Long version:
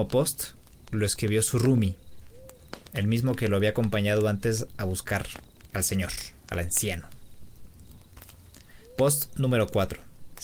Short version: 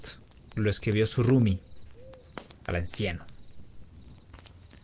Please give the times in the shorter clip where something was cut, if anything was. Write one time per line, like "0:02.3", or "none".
0:02.5